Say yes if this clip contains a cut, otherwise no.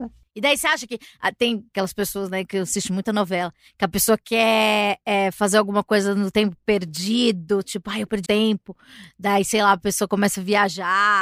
yes